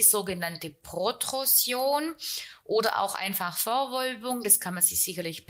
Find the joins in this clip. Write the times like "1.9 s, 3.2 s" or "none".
none